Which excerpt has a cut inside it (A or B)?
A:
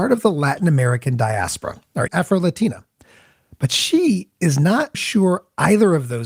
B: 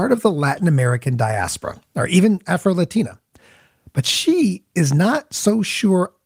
A